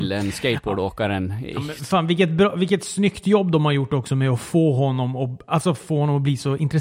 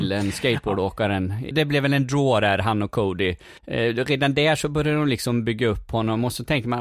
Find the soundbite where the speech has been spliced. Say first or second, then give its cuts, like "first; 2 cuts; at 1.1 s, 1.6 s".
second; 2 cuts; at 1.5 s, 3.6 s